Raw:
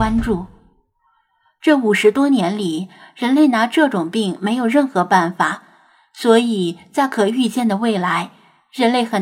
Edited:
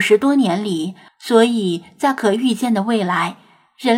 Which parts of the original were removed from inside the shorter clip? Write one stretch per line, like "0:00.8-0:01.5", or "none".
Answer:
0:03.0-0:06.0

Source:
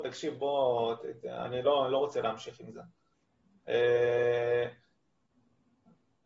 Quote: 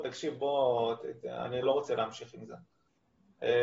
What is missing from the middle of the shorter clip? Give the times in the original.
0:01.6-0:01.9

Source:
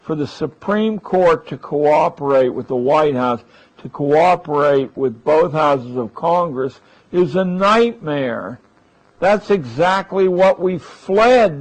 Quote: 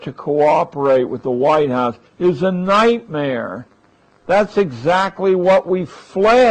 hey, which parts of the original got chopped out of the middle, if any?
0:03.5-0:07.0

